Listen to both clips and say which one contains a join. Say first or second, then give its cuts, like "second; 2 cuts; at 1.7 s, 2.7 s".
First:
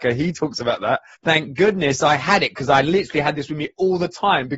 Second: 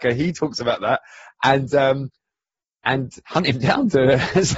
first; 1 cut; at 1.1 s